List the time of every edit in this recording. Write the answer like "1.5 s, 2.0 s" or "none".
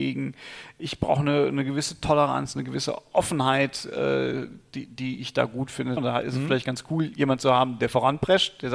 6.0 s